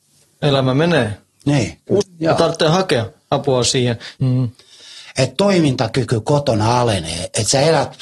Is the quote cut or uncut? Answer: cut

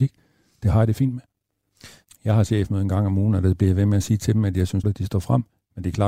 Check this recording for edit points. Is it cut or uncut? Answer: cut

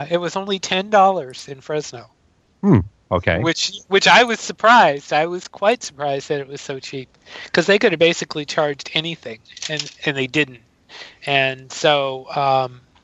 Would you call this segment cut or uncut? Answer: uncut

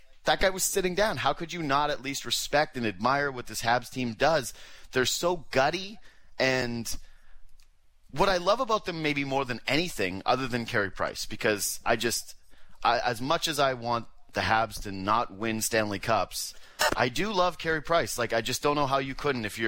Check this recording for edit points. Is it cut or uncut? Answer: uncut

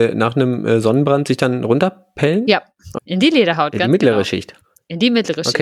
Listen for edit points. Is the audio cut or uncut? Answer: cut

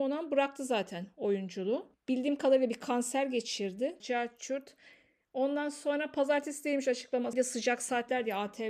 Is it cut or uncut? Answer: cut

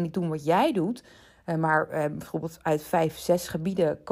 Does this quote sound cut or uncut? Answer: uncut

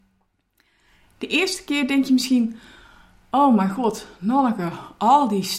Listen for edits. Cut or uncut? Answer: uncut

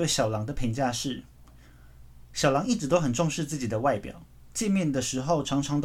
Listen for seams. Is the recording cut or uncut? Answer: uncut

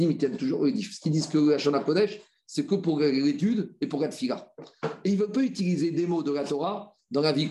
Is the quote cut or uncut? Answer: uncut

